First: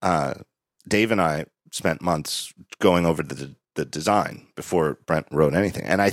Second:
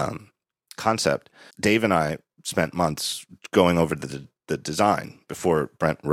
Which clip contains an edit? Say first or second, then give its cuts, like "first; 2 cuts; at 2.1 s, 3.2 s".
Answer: second; 1 cut; at 1.5 s